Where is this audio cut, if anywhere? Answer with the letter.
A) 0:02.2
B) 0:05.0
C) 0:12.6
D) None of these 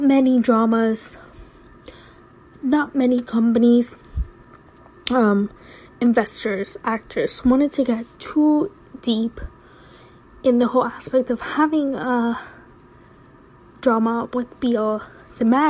D